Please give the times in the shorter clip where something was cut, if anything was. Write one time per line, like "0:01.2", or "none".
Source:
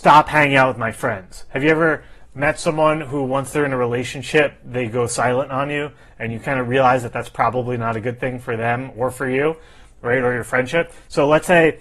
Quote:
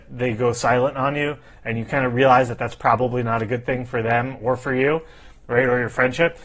none